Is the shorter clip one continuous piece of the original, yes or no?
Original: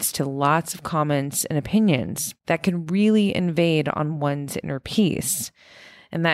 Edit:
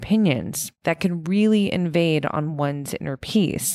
yes